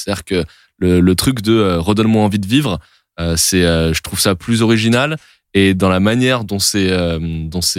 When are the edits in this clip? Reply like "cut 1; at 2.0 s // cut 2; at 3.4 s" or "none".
none

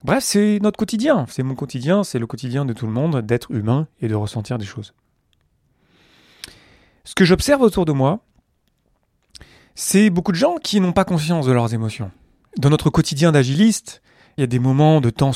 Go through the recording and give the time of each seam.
cut 1; at 12.5 s // cut 2; at 14.4 s

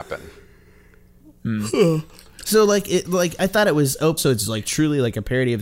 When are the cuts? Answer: cut 1; at 4.2 s

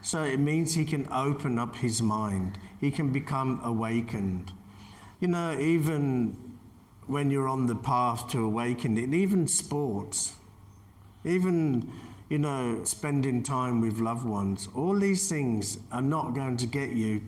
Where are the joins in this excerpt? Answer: cut 1; at 5.1 s // cut 2; at 12.8 s

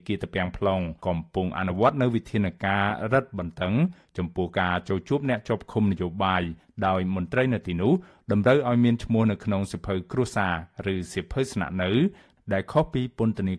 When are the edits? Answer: cut 1; at 1.0 s

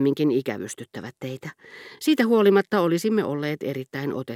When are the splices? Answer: none

